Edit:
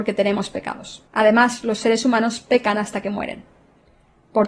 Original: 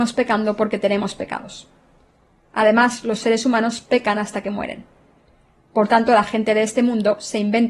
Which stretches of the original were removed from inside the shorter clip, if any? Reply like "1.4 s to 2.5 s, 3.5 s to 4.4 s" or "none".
1.7 s to 2.5 s